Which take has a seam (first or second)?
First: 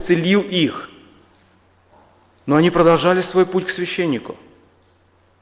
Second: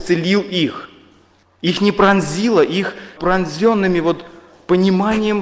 second